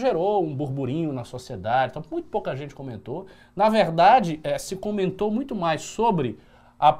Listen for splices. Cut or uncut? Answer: uncut